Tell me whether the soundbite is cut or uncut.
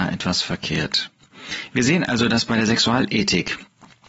uncut